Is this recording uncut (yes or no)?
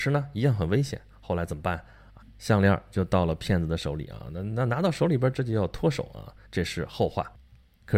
no